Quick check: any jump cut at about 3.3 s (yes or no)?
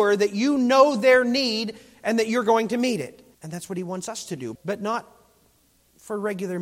yes